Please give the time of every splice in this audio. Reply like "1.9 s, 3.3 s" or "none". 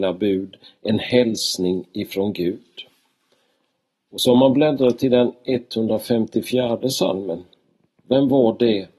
8.0 s